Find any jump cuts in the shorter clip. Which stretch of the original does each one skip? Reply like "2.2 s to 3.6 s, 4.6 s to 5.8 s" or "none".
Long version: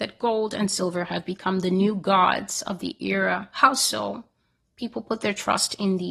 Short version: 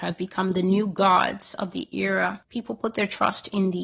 3.5 s to 4.7 s